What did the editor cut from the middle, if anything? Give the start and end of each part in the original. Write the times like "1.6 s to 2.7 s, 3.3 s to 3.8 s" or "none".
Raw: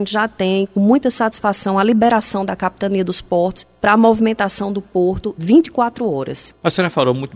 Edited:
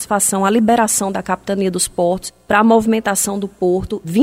none